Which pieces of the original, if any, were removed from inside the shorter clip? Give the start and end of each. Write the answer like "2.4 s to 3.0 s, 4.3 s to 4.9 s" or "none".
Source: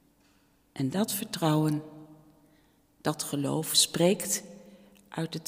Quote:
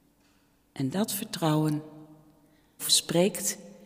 2.8 s to 3.6 s